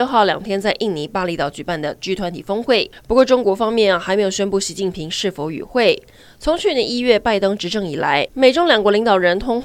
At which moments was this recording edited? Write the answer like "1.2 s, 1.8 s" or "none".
none